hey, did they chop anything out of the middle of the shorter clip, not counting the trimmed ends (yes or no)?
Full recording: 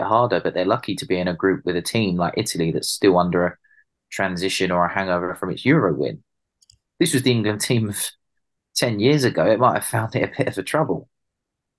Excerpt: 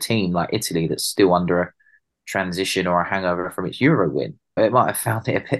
yes